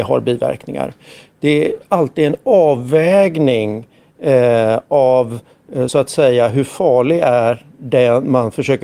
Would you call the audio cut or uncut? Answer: uncut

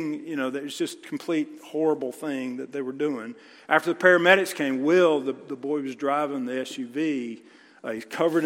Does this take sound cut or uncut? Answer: uncut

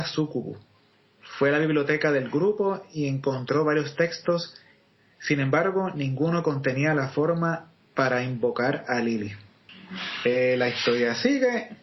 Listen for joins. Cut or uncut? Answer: uncut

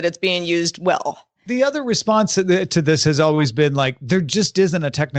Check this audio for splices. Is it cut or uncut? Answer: uncut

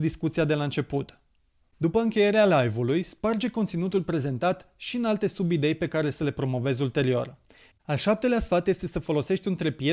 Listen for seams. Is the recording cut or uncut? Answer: cut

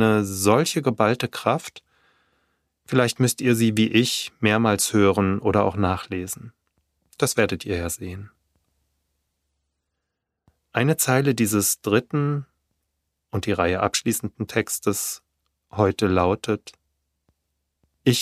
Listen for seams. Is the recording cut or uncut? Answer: uncut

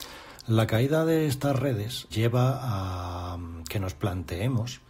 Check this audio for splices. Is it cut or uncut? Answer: cut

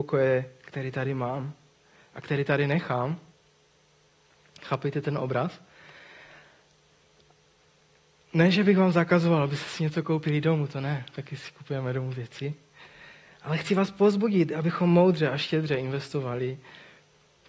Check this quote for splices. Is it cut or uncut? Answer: uncut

